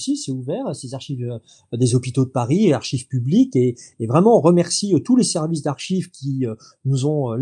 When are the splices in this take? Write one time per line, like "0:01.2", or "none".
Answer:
none